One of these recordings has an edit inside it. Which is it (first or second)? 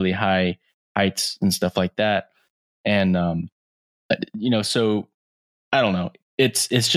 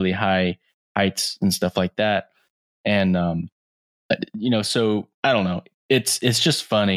second